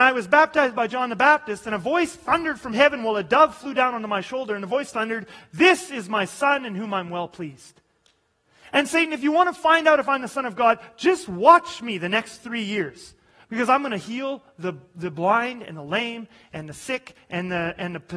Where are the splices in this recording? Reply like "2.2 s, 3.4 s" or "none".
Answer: none